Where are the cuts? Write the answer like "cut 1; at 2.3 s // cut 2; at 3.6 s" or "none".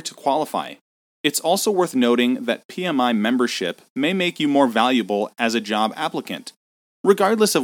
cut 1; at 1.2 s